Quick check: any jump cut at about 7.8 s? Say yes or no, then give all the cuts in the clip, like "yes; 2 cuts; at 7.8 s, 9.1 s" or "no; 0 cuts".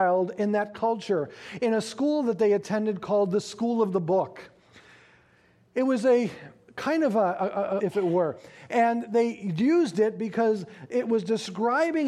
yes; 1 cut; at 7.8 s